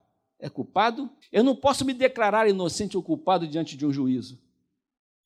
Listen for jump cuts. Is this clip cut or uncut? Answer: cut